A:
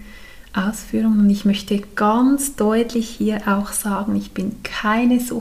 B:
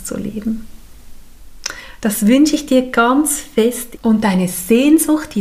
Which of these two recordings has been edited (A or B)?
B